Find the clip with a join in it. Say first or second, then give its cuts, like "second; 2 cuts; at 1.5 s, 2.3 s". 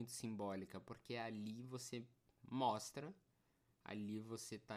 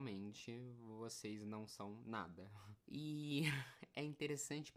second; 1 cut; at 2.8 s